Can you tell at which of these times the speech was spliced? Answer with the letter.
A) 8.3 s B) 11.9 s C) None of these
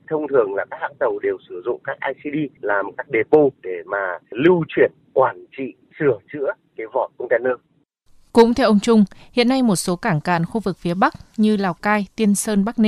C